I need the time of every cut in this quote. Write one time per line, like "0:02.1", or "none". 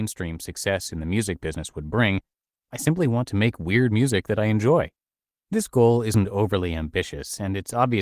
none

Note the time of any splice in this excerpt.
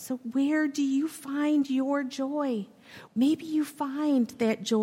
0:03.1

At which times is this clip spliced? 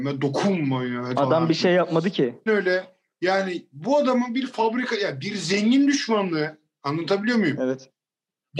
0:01.1
0:02.5

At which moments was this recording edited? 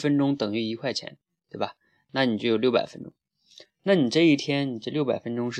none

